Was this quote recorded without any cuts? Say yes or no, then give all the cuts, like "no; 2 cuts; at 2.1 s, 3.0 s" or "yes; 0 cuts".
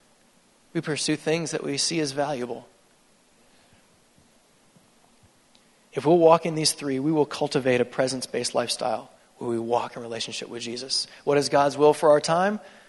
yes; 0 cuts